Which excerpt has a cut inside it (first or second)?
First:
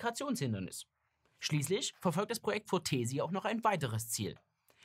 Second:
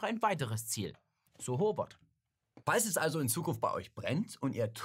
second